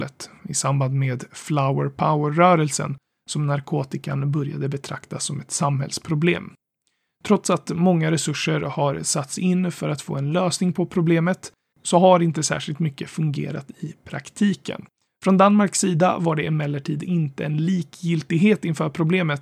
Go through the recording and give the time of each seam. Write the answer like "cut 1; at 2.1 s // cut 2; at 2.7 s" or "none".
cut 1; at 11.7 s // cut 2; at 15.1 s